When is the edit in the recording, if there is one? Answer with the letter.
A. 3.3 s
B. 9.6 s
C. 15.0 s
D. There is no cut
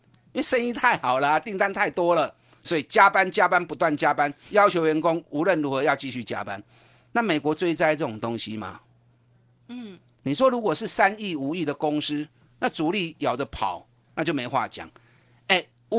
B